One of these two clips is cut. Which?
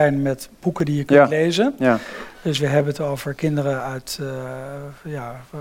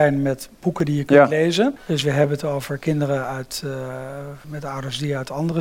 second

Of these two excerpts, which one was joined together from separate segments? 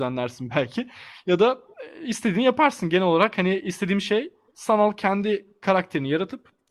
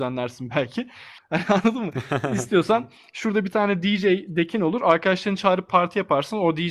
second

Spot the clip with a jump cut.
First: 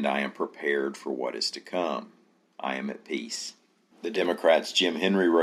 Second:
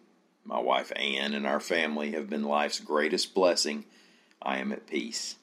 first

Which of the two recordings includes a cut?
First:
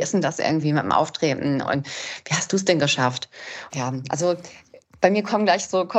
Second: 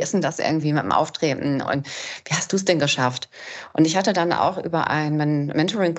first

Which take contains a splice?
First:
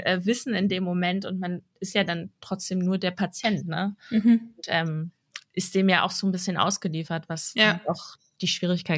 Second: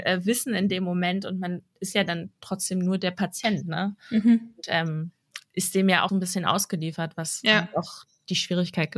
second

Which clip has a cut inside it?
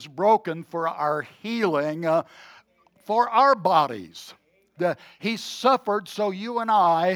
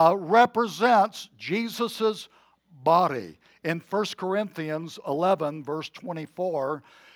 first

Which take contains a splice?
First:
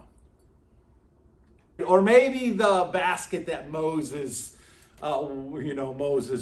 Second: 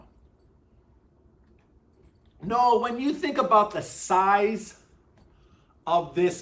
first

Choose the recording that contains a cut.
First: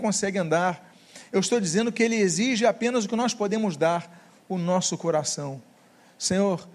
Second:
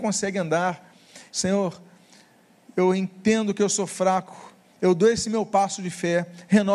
second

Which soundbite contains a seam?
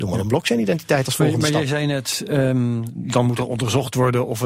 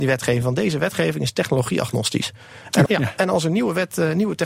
second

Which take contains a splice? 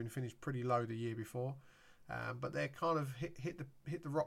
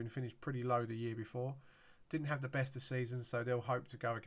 second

